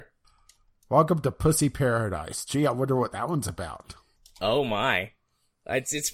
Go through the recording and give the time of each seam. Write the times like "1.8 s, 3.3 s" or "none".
none